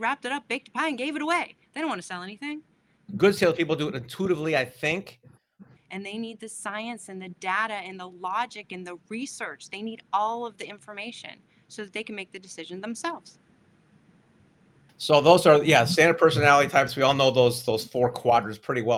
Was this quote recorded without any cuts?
no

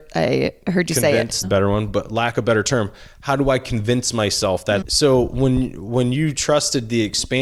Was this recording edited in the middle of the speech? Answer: yes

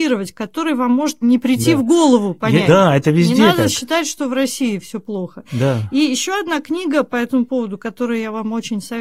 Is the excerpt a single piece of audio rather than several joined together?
no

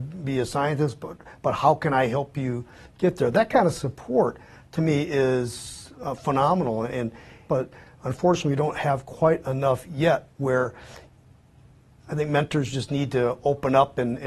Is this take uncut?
no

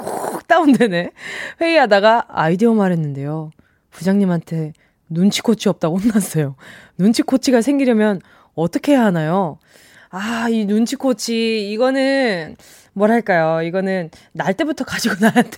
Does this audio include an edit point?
no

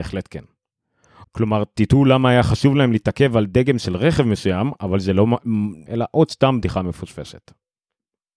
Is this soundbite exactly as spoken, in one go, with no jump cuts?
no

